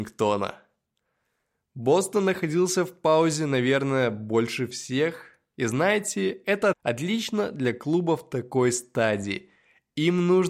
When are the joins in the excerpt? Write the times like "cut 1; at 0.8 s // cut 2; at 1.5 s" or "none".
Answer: cut 1; at 6.7 s

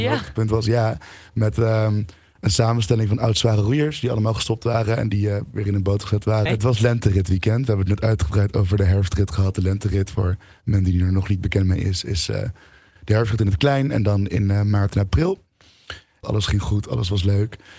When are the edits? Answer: cut 1; at 6.5 s // cut 2; at 16.2 s

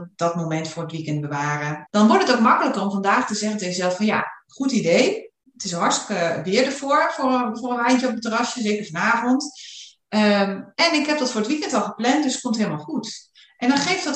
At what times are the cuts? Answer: cut 1; at 1.9 s

